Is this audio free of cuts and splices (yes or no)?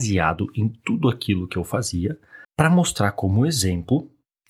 no